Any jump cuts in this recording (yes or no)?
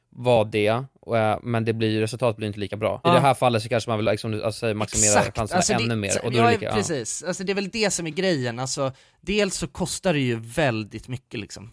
yes